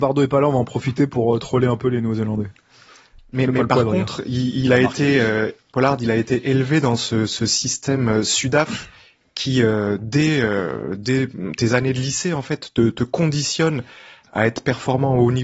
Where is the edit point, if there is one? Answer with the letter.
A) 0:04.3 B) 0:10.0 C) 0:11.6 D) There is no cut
D